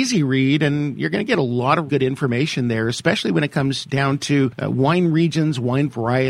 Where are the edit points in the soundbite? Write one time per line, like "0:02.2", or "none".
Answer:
0:01.9